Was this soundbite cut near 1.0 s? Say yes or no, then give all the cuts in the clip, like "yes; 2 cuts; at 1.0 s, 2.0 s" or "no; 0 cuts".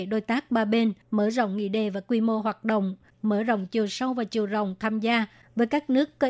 yes; 2 cuts; at 1.0 s, 3.1 s